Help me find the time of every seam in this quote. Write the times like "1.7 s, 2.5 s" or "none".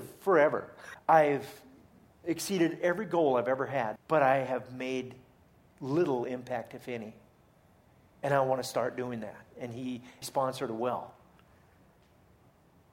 0.9 s, 4.0 s, 10.2 s